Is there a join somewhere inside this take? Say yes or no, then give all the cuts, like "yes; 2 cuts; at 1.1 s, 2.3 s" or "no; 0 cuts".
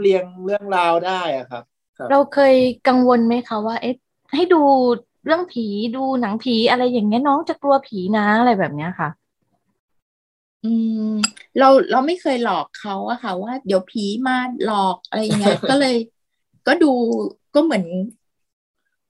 no; 0 cuts